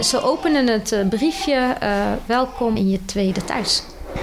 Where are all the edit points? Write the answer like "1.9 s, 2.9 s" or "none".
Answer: 2.8 s